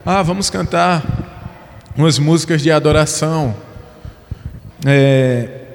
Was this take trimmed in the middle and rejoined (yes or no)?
yes